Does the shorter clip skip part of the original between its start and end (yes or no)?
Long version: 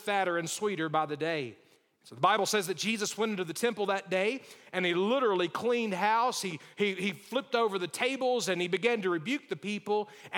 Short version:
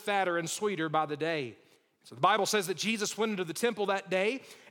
no